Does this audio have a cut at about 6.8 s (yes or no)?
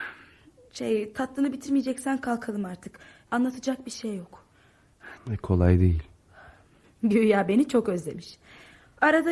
yes